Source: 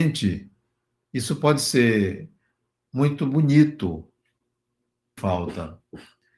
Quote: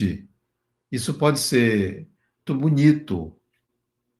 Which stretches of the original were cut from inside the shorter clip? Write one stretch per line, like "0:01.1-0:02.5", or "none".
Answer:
0:02.7-0:03.2